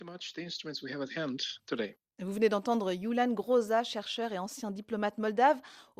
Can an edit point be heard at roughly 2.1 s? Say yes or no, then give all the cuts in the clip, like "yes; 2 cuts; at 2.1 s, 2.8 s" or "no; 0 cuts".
no; 0 cuts